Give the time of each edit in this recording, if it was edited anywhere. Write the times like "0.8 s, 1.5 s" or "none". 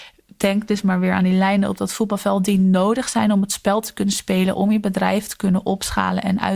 4.5 s